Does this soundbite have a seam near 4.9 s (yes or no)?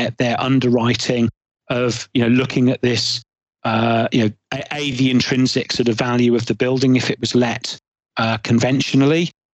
no